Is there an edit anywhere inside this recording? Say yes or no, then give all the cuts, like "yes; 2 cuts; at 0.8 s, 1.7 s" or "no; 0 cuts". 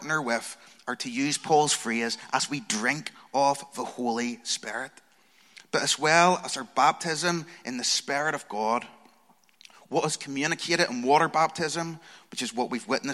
no; 0 cuts